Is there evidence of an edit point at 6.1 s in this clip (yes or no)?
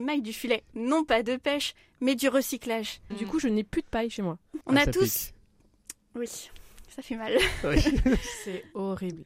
no